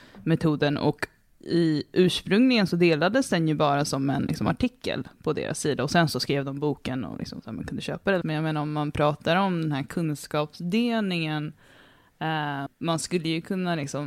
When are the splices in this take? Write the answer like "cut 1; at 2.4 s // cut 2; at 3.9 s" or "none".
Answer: cut 1; at 8.2 s // cut 2; at 12.7 s